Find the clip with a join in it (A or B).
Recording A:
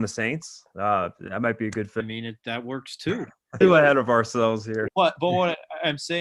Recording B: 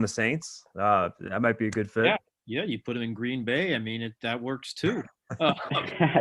A